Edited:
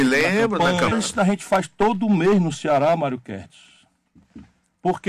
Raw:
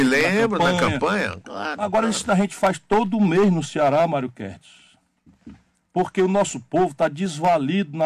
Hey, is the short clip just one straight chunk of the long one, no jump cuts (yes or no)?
no